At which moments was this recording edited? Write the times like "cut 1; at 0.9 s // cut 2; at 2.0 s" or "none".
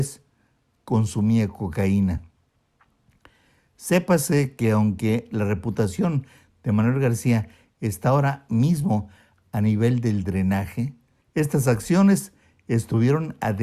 cut 1; at 11.2 s